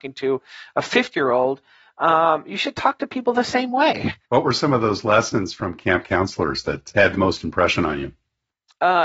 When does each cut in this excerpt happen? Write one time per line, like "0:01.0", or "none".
0:04.2
0:06.9